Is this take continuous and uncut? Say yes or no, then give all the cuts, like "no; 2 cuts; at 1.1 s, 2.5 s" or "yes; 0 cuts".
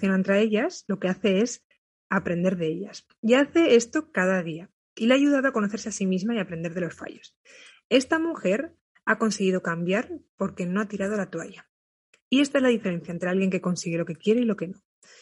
yes; 0 cuts